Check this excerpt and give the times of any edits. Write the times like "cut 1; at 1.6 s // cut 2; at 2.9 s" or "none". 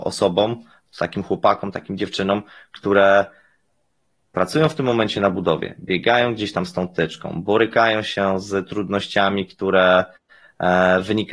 none